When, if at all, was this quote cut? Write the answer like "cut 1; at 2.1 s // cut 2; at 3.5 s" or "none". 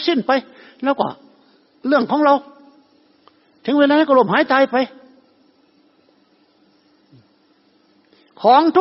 none